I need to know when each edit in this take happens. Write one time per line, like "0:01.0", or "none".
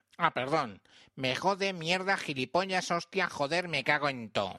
none